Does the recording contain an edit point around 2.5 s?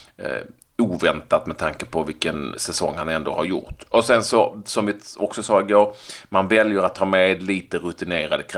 yes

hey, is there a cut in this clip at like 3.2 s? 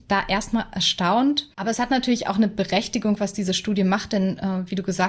no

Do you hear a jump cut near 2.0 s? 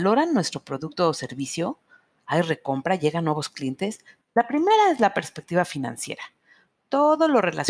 no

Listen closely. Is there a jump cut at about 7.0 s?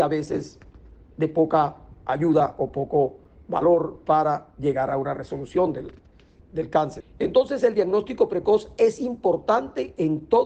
yes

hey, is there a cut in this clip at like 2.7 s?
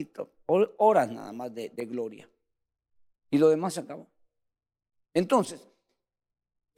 no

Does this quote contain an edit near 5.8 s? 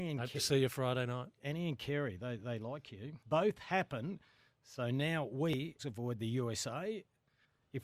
yes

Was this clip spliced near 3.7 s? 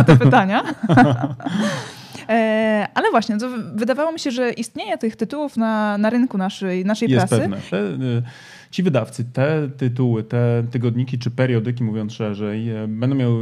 no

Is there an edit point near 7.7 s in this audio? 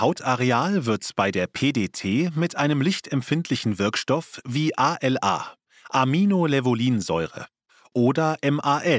no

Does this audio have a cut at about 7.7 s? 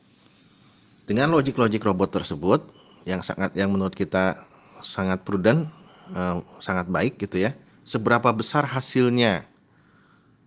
no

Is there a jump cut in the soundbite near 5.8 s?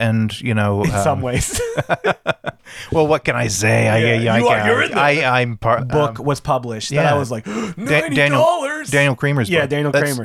yes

